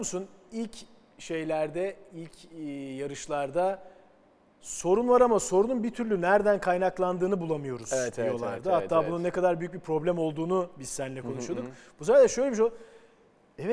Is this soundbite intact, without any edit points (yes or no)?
yes